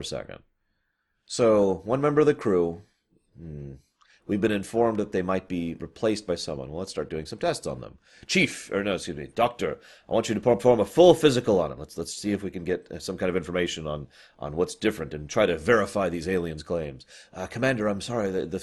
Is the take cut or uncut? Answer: uncut